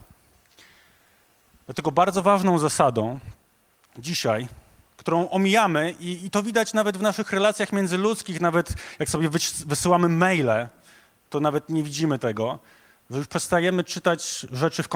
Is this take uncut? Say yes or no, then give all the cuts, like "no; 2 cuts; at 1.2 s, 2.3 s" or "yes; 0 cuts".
yes; 0 cuts